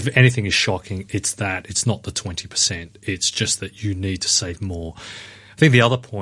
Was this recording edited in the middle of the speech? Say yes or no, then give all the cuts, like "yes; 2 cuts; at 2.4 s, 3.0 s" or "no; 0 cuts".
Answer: no; 0 cuts